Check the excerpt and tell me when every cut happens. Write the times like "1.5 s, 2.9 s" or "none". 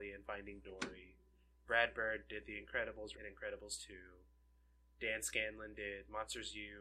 3.1 s